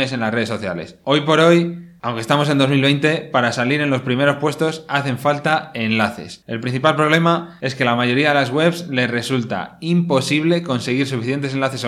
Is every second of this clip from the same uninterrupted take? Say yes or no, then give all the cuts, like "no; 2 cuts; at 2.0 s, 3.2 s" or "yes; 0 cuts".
yes; 0 cuts